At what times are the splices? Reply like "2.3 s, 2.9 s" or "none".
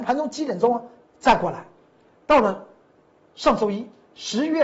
1.1 s